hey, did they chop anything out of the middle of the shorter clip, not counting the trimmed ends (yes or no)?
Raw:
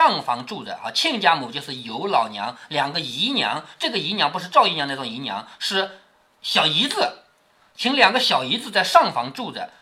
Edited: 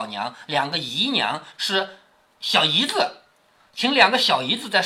yes